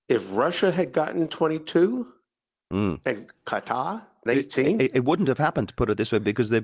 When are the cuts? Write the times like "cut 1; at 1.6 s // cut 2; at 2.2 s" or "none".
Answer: cut 1; at 4.3 s